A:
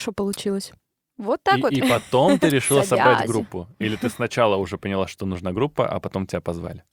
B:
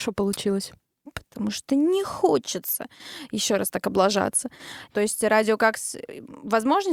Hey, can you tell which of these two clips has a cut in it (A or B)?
B